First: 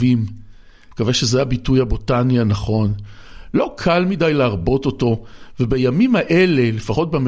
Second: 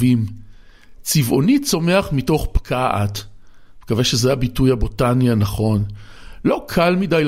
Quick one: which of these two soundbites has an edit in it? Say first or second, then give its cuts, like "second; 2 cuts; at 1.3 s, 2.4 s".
first; 1 cut; at 0.9 s